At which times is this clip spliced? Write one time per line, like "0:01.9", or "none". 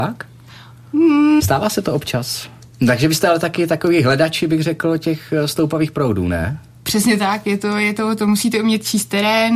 0:01.4
0:02.8